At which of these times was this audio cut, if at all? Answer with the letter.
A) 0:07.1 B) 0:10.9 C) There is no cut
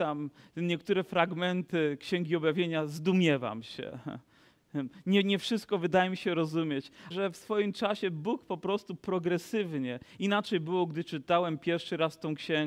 A